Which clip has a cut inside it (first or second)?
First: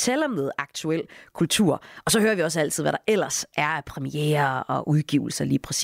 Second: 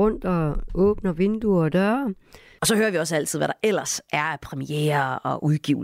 second